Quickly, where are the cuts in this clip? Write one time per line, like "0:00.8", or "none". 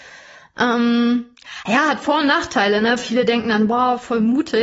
none